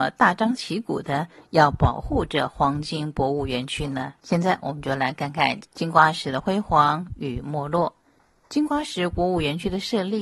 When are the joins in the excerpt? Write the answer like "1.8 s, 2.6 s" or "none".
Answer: 4.2 s